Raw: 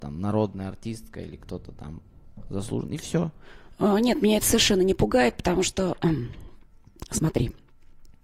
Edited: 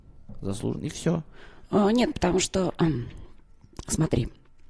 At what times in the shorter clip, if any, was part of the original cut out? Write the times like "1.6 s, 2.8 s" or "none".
2.1 s